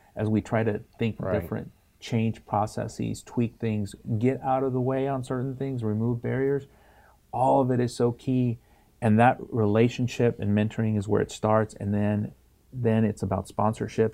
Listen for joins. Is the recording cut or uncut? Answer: uncut